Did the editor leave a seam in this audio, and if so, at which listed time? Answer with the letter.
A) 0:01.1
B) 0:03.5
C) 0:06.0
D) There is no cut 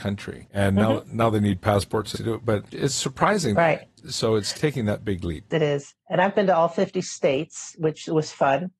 B